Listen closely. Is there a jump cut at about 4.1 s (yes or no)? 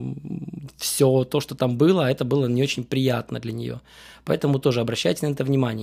no